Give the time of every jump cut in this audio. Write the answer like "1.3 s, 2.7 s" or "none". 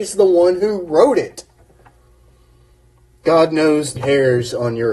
4.0 s